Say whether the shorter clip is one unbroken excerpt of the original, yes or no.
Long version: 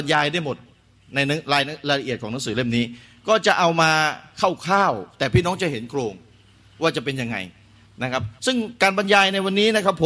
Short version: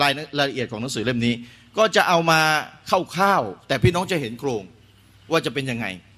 yes